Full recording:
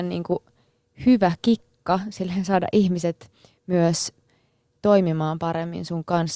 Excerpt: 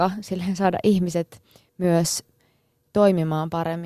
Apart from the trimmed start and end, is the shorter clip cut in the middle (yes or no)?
no